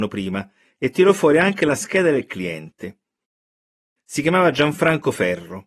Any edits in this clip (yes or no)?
yes